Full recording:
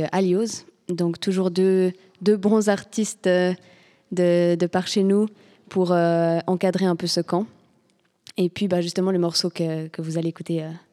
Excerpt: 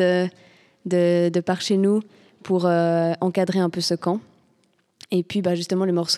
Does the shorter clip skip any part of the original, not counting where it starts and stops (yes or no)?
no